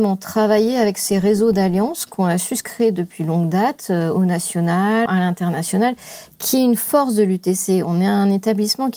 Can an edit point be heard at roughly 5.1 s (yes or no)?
yes